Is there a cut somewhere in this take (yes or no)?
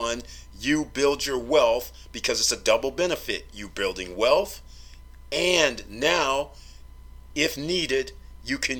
no